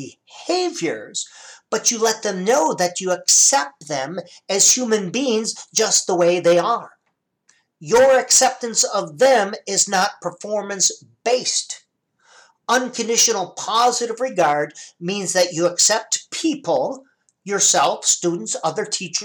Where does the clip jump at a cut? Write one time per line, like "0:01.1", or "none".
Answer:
none